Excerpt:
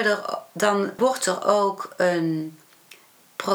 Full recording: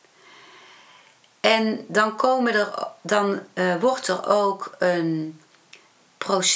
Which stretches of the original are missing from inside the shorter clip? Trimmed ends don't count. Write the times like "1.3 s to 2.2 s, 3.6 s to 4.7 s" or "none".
3.5 s to 3.8 s